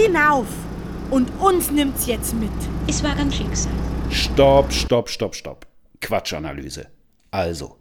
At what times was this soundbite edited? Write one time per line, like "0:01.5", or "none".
0:03.3